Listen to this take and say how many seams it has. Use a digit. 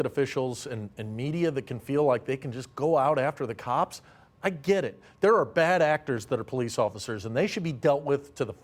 0